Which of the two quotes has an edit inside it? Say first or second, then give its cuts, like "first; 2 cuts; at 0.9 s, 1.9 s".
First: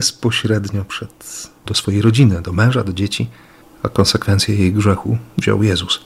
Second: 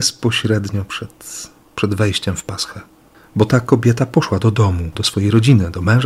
first; 1 cut; at 1.6 s